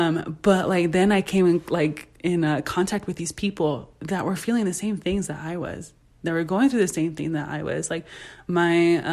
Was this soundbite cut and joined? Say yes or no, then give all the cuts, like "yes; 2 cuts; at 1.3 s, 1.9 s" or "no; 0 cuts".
no; 0 cuts